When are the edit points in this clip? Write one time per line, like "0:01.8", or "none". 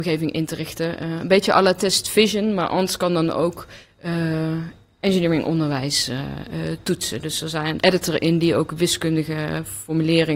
0:07.8